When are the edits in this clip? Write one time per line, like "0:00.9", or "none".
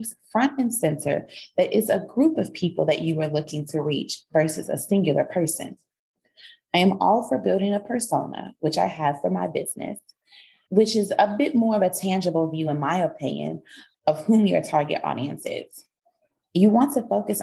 none